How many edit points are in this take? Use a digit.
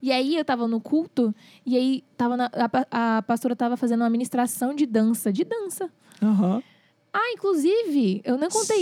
0